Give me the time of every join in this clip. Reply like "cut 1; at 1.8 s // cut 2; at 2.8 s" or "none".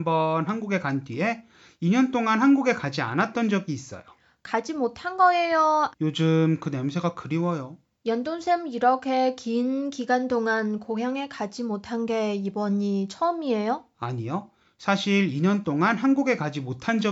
cut 1; at 5.9 s // cut 2; at 8.0 s